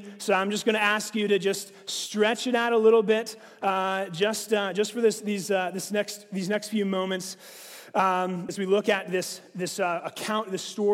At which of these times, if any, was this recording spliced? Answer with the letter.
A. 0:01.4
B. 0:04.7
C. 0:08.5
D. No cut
C